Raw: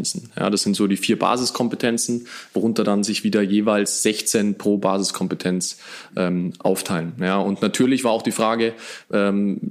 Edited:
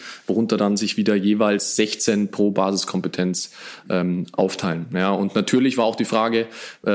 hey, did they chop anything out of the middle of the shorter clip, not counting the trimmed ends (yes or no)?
no